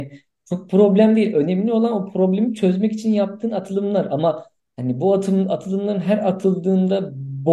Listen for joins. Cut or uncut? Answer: uncut